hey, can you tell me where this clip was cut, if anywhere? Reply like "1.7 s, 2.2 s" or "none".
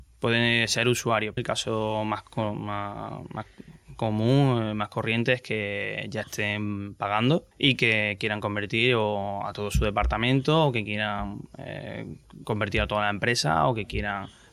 1.4 s, 7.5 s